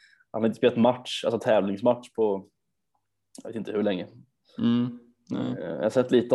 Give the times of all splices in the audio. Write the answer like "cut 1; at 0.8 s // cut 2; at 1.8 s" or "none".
none